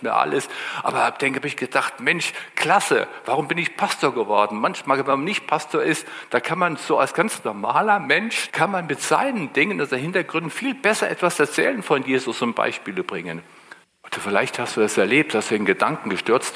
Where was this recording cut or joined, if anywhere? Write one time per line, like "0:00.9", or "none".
0:08.5
0:13.8